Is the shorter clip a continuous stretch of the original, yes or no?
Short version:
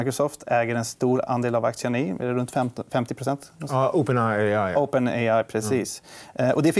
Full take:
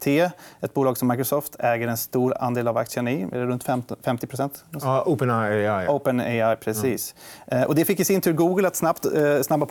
yes